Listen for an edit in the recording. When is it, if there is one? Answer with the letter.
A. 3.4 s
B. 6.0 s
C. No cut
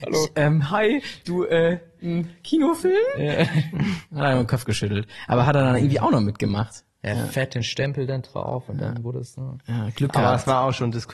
C